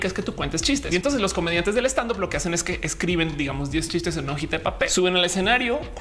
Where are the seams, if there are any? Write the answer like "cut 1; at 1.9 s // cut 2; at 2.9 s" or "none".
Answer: none